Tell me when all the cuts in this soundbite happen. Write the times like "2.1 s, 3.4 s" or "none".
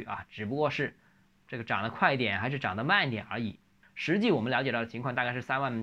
3.8 s